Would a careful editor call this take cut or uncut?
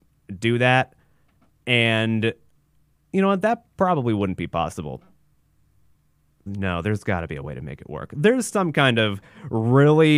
cut